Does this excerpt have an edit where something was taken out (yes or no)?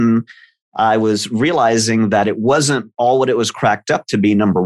no